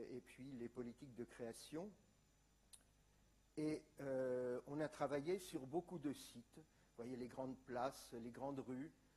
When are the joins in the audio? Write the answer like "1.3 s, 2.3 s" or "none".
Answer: none